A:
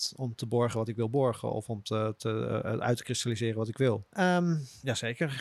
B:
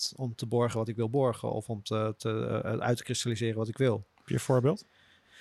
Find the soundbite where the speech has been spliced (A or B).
A